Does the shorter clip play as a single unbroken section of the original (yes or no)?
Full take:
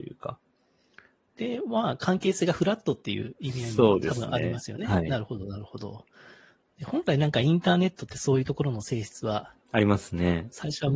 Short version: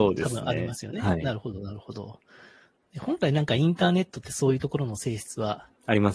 yes